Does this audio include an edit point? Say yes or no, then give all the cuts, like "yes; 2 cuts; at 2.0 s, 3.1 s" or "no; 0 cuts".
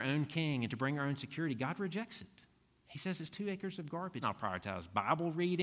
yes; 1 cut; at 4.2 s